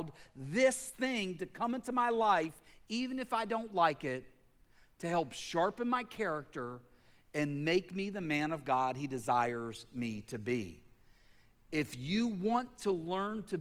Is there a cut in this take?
no; 0 cuts

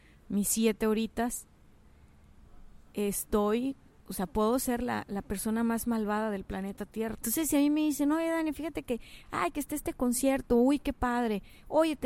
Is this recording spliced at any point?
yes; 1 cut; at 7.1 s

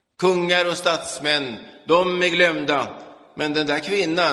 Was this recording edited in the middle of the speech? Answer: no; 0 cuts

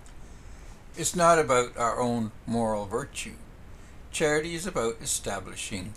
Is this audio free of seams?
no; 1 cut; at 0.9 s

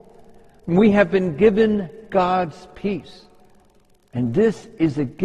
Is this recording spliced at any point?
no; 0 cuts

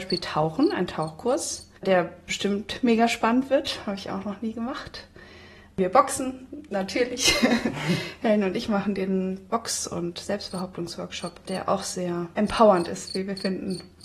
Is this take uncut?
no; 1 cut; at 1.8 s

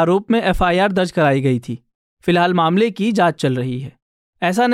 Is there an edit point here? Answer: no; 0 cuts

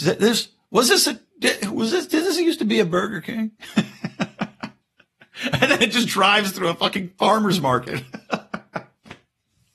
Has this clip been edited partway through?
no; 0 cuts

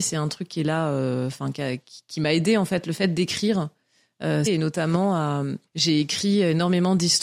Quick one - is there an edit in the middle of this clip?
yes; 2 cuts; at 4.5 s, 5.7 s

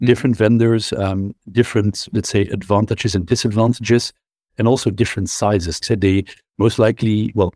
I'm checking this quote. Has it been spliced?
yes; 1 cut; at 5.8 s

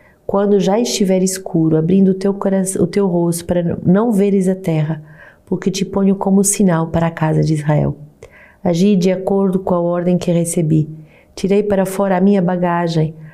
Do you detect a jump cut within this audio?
no; 0 cuts

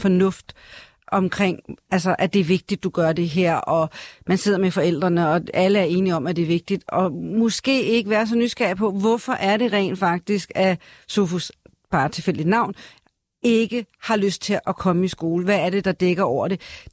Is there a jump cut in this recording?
no; 0 cuts

